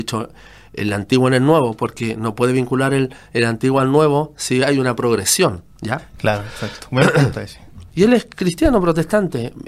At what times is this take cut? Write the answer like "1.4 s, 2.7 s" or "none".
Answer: 7.9 s